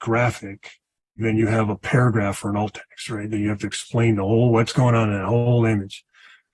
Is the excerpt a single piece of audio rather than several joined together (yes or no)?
no